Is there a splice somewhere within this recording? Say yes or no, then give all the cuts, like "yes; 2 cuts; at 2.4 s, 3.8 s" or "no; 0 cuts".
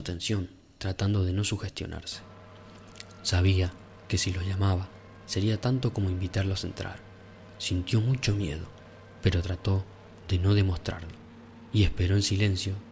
no; 0 cuts